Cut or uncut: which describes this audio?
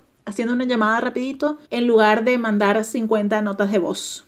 cut